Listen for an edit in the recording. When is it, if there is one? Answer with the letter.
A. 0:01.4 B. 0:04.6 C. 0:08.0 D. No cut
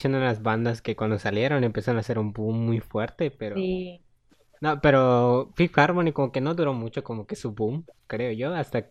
C